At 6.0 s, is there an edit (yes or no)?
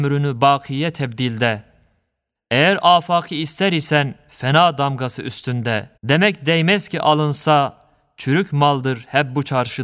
yes